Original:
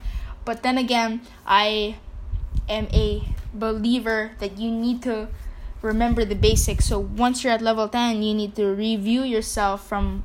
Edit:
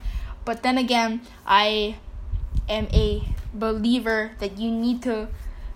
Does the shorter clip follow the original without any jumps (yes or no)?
yes